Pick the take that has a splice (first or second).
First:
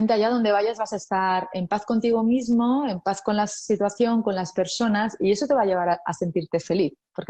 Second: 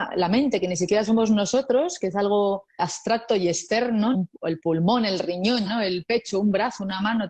second